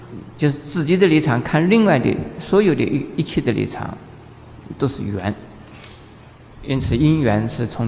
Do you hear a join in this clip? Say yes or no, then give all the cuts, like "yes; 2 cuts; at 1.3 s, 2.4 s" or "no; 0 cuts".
no; 0 cuts